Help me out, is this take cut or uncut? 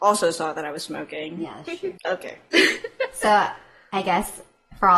cut